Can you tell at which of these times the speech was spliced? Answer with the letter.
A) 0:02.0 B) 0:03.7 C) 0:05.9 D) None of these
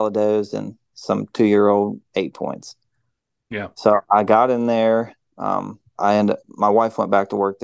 C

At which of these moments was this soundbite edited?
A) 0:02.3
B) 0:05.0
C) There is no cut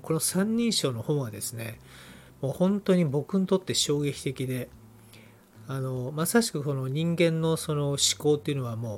A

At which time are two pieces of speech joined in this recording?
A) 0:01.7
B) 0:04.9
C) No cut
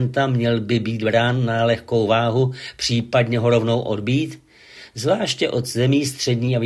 C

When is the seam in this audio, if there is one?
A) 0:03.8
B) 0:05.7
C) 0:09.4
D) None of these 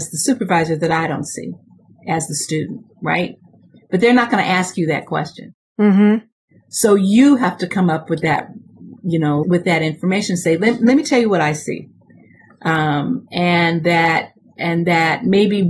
C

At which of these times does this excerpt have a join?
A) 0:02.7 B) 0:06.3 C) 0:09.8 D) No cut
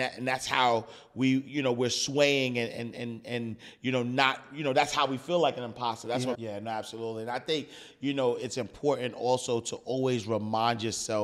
B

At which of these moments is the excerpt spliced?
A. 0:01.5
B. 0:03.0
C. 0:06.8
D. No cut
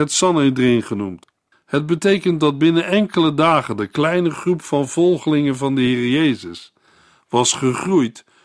A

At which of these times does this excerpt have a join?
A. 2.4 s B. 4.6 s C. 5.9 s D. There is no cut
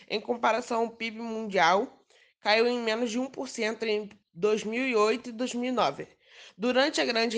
D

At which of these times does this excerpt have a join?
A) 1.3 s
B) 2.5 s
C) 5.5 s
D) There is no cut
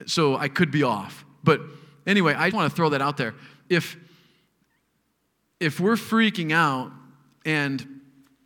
B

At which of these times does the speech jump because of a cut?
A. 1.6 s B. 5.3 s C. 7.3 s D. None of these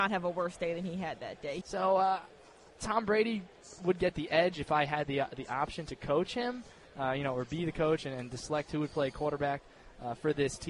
A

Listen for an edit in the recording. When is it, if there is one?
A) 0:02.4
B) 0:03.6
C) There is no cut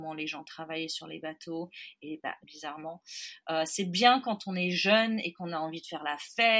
A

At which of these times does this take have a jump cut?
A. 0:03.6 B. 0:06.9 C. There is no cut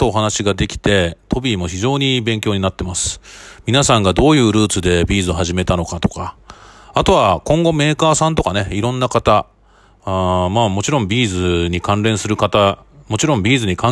C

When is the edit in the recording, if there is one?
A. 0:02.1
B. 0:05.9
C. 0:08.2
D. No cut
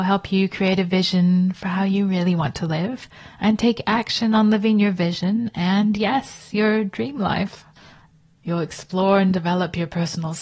D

